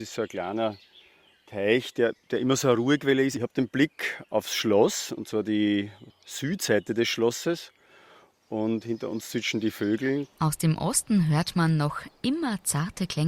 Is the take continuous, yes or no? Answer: yes